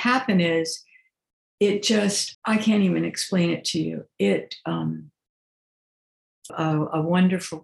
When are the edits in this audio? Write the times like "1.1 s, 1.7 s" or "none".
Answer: 2.3 s, 6.5 s